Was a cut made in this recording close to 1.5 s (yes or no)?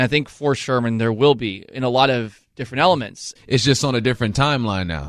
no